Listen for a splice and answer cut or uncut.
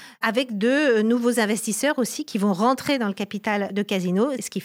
uncut